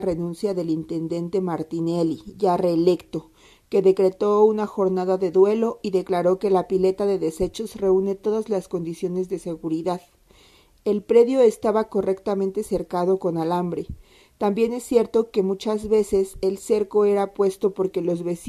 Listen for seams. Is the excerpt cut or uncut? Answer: uncut